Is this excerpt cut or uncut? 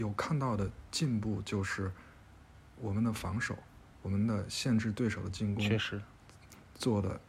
uncut